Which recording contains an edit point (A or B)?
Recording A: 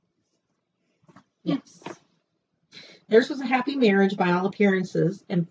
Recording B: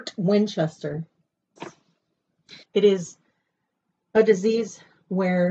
B